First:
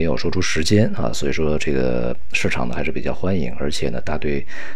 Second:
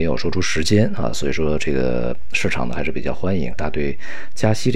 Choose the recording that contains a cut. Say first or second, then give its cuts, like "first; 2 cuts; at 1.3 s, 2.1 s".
second; 1 cut; at 3.5 s